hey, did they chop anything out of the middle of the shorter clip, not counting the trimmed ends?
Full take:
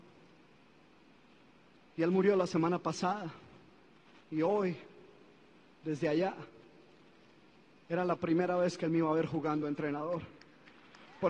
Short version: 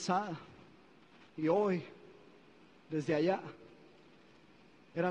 no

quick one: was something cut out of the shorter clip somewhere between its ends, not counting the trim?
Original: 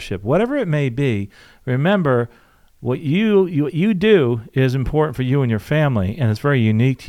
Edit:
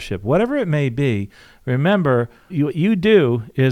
yes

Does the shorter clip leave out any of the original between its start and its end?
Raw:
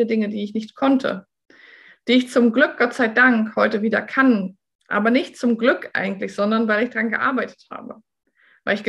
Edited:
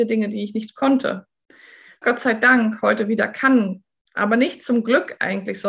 yes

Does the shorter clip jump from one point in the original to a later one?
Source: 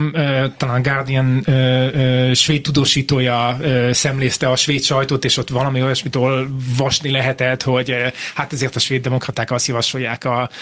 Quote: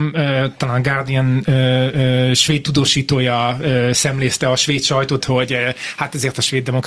yes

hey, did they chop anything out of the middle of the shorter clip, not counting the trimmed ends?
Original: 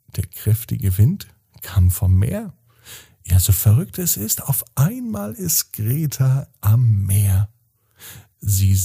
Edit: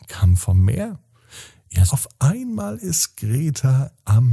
yes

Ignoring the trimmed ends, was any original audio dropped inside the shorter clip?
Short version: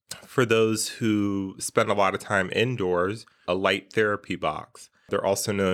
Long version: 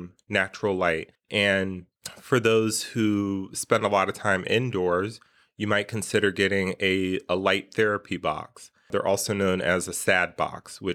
yes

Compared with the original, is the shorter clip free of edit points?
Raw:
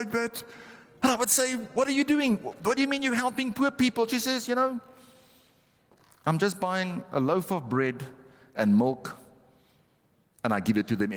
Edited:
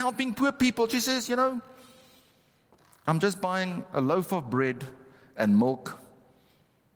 yes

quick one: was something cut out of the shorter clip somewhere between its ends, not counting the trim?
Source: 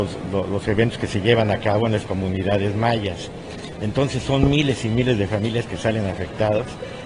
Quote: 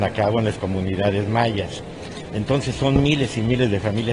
no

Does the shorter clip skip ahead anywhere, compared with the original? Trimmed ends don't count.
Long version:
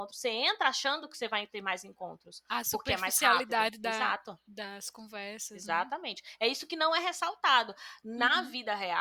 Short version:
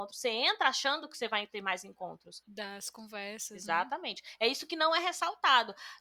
yes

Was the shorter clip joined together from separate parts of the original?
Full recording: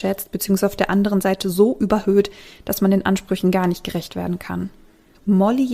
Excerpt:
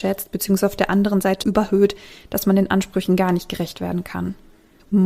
yes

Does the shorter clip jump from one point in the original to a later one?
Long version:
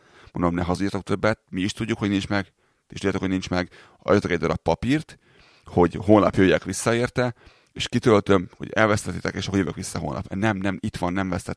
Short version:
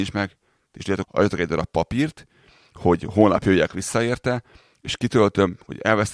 yes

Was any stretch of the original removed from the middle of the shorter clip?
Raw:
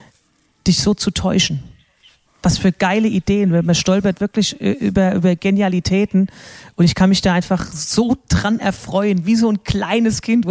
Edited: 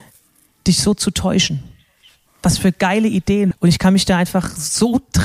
yes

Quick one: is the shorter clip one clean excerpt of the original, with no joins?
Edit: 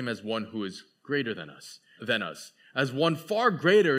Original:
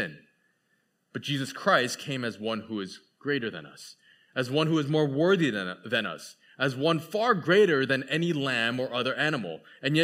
no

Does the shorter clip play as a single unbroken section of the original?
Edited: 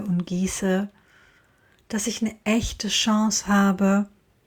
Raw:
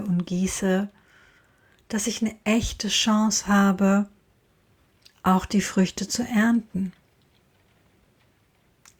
yes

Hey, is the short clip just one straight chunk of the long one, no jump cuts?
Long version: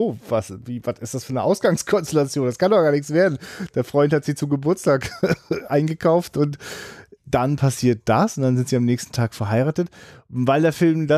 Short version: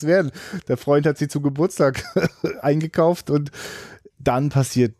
yes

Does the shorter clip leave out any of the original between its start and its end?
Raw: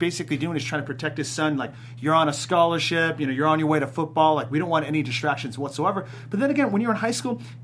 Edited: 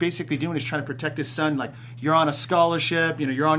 no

